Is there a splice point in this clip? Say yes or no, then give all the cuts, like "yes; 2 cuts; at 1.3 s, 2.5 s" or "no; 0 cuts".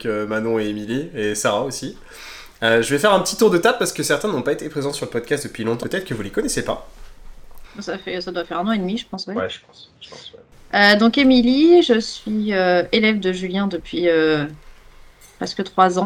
yes; 2 cuts; at 5.8 s, 7.6 s